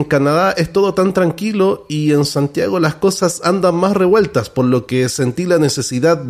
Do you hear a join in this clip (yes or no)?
no